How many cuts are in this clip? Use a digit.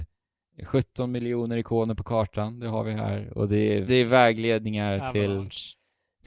1